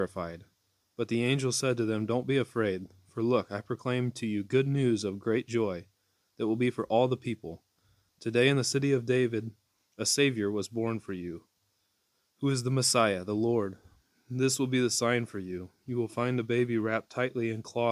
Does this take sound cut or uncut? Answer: uncut